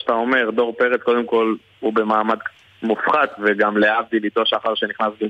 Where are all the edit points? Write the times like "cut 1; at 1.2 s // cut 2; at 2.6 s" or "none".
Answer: cut 1; at 3.4 s